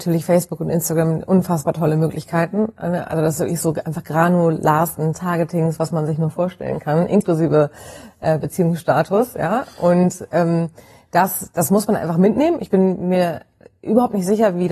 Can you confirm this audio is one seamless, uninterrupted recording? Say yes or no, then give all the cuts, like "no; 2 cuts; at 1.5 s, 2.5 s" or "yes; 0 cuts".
yes; 0 cuts